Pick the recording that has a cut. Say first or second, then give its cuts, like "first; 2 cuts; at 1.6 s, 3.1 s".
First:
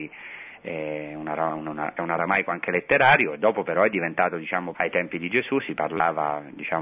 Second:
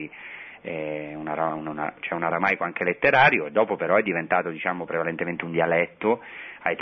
first; 2 cuts; at 2.0 s, 4.7 s